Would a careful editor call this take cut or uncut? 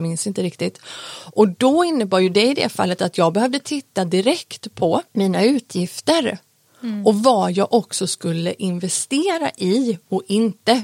cut